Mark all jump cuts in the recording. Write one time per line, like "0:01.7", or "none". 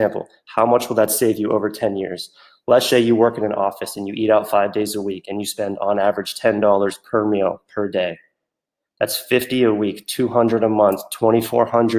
0:02.9